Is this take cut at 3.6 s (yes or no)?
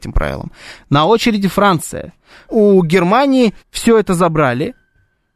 yes